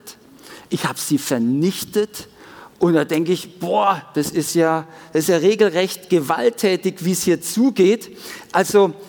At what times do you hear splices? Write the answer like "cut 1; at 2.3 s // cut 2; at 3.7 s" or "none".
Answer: none